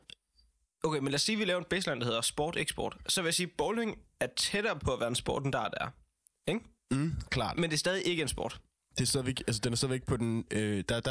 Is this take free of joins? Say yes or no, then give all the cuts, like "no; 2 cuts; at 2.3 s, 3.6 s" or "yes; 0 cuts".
yes; 0 cuts